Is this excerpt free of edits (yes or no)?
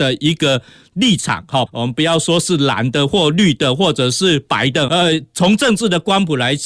no